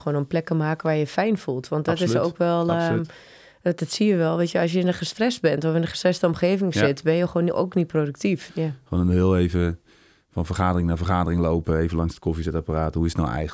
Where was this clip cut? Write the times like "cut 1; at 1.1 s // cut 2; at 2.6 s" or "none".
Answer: cut 1; at 8.5 s